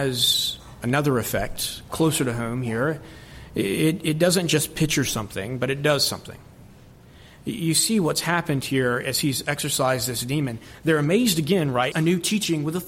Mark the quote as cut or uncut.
cut